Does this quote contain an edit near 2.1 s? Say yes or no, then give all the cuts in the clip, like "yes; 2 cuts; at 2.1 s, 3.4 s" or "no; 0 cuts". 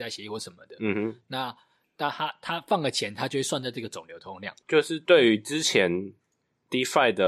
no; 1 cut; at 4.6 s